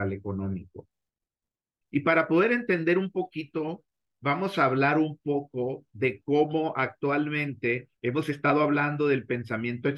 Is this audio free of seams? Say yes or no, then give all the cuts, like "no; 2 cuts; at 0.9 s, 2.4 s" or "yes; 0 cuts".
no; 2 cuts; at 1.8 s, 8.0 s